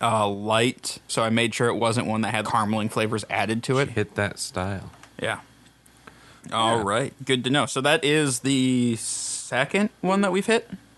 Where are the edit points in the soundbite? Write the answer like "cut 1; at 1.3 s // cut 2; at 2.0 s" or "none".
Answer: cut 1; at 1.1 s // cut 2; at 2.4 s // cut 3; at 3.9 s